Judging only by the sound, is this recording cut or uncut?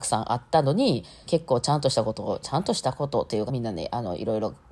cut